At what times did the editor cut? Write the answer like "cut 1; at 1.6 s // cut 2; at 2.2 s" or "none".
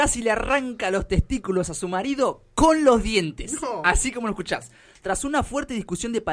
none